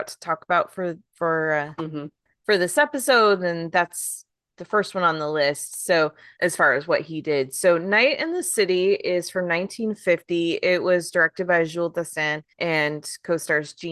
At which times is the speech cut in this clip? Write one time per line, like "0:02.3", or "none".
0:06.4
0:12.5